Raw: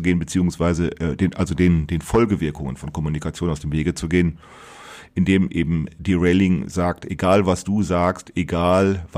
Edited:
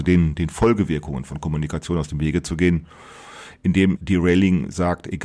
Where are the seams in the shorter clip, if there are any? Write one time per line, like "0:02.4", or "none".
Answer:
0:04.0